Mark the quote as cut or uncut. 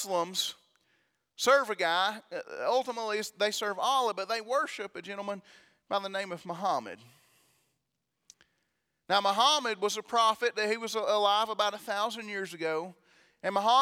uncut